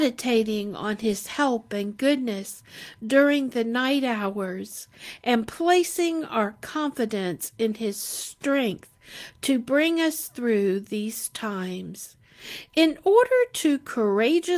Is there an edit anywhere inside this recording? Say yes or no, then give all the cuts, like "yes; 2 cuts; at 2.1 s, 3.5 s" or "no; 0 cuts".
no; 0 cuts